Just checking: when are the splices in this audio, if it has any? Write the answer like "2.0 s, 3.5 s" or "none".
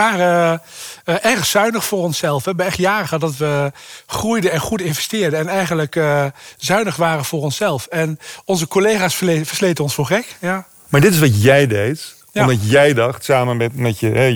none